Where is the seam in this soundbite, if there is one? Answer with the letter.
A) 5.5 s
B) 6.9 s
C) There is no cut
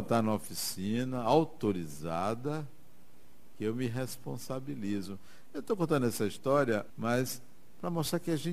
B